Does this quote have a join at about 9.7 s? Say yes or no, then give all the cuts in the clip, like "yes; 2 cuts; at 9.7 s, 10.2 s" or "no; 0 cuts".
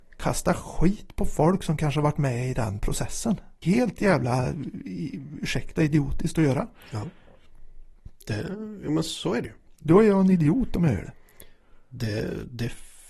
no; 1 cut; at 3.6 s